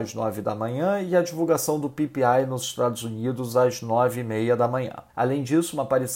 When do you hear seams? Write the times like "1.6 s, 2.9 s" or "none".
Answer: 5.1 s